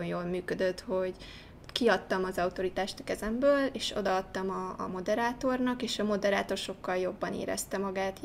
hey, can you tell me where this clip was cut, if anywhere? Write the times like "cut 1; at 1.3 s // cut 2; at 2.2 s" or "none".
none